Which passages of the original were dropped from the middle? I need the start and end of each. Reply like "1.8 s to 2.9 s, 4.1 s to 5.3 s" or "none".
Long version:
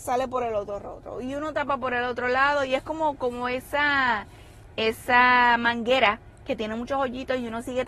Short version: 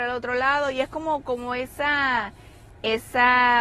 none